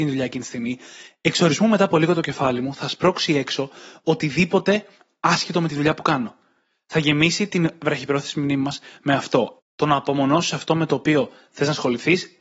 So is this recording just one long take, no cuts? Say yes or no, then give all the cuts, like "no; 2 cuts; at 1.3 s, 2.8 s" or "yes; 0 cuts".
no; 1 cut; at 9.6 s